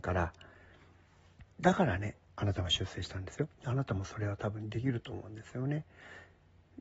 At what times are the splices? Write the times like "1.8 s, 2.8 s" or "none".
1.5 s, 3.5 s